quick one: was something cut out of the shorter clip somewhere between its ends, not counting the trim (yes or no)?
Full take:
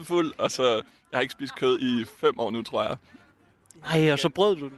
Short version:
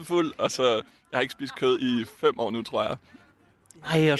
no